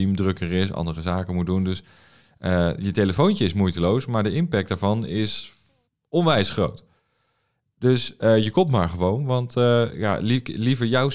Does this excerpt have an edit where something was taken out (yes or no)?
no